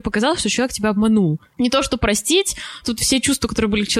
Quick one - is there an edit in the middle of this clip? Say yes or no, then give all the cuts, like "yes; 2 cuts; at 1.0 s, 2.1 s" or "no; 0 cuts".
yes; 2 cuts; at 1.5 s, 2.8 s